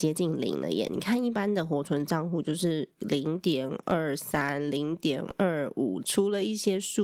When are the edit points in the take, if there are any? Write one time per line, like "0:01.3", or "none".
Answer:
0:06.0